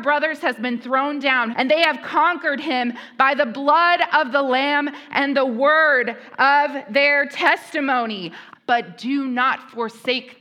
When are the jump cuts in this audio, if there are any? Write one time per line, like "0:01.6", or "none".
0:01.5
0:08.6